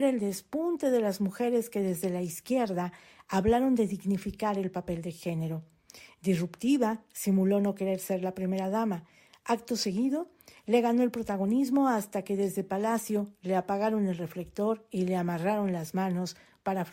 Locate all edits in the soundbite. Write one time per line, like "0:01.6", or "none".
none